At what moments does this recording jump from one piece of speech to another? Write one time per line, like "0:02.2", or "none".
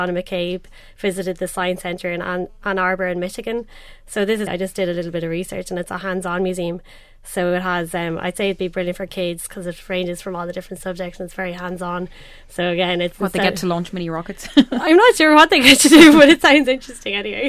0:04.5